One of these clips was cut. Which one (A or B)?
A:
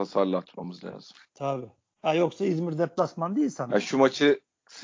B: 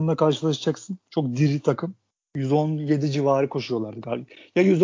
A